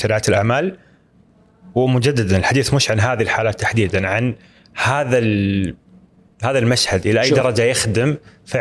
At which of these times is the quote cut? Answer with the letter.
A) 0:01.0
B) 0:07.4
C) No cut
C